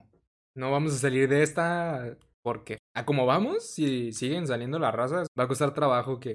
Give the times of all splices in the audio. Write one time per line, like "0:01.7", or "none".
0:02.8
0:05.3